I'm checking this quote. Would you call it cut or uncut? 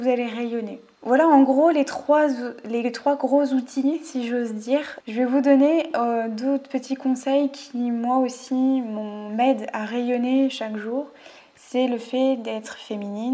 uncut